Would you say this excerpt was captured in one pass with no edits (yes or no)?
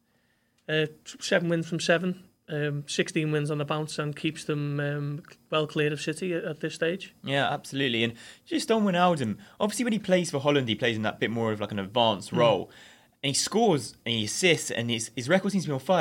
yes